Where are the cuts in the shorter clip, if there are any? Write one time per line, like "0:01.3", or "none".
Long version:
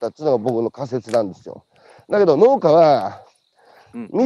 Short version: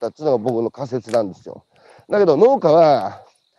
none